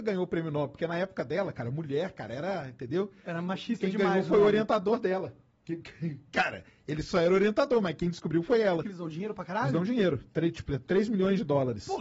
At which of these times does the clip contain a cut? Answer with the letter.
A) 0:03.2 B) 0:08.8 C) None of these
B